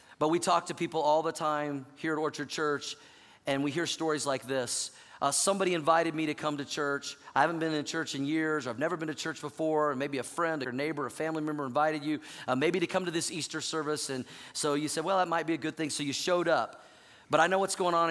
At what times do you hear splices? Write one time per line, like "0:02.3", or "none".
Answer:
0:10.6

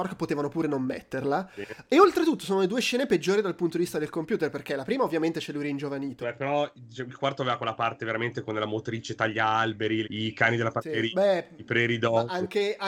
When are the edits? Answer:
0:06.2
0:10.0

